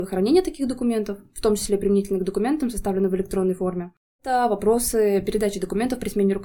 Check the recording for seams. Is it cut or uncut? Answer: uncut